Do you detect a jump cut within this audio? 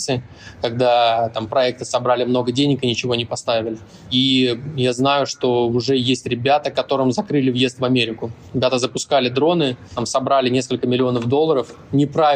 no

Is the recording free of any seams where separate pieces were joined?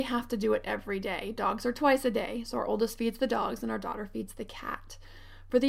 yes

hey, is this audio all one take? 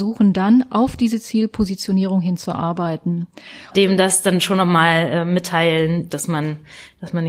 no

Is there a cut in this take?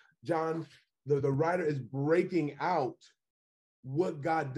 no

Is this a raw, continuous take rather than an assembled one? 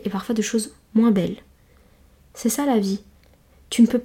yes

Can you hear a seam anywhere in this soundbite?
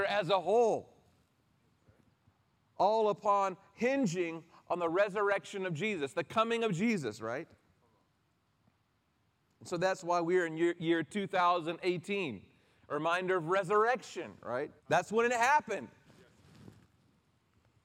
yes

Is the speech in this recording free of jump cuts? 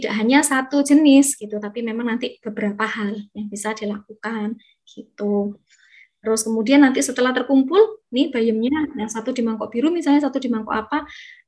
yes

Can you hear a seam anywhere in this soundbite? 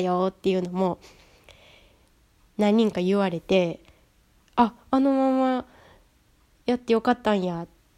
no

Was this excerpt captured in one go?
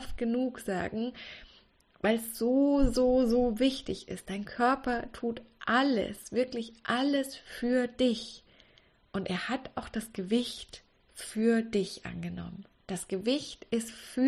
yes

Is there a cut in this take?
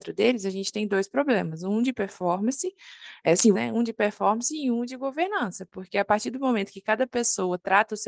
yes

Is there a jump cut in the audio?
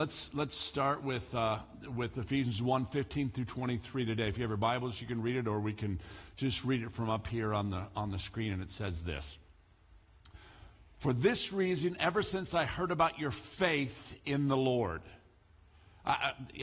no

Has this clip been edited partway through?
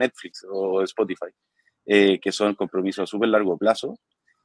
no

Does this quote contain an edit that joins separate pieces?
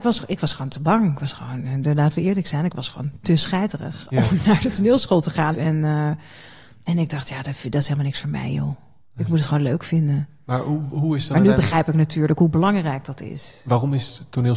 yes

